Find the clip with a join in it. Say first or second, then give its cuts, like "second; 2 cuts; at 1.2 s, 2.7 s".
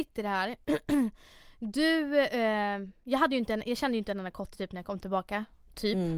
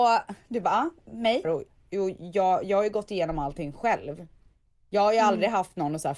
second; 1 cut; at 1.4 s